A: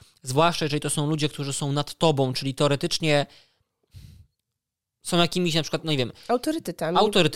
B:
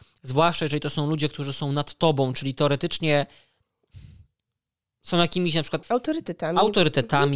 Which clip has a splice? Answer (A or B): B